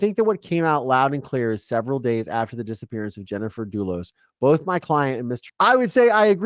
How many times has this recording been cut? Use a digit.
1